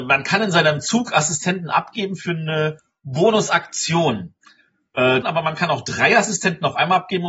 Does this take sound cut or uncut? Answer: cut